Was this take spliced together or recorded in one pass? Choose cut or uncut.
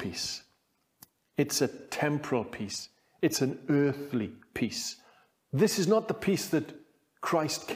uncut